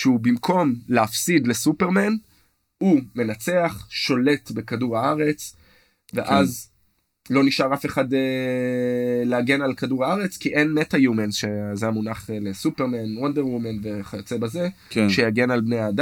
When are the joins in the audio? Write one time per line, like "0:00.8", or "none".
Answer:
none